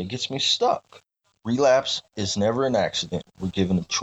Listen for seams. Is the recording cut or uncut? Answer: cut